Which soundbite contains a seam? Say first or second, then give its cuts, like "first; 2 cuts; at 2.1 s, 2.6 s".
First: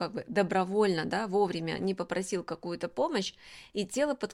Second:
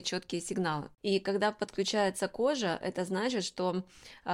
second; 1 cut; at 1.0 s